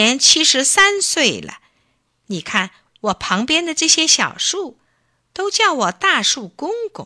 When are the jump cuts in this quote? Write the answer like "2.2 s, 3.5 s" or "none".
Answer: none